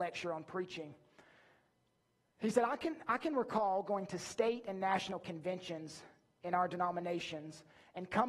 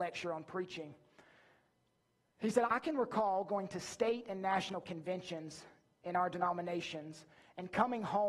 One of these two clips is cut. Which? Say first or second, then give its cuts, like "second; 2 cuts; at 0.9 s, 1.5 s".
second; 1 cut; at 2.7 s